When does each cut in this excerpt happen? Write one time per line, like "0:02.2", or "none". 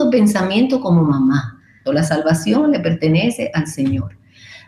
0:01.9